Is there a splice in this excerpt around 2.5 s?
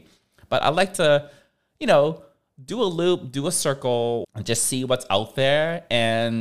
no; 1 cut; at 4.2 s

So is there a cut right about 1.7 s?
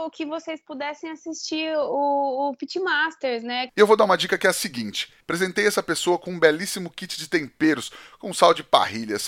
no; 2 cuts; at 3.7 s, 5.2 s

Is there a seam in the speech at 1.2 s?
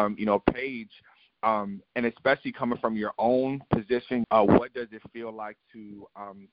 no; 1 cut; at 4.2 s

